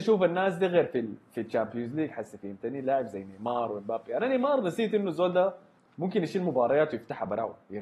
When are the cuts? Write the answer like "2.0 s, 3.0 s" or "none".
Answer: none